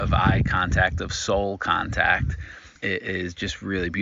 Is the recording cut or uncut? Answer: cut